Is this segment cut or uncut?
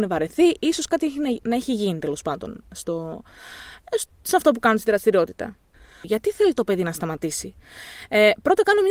cut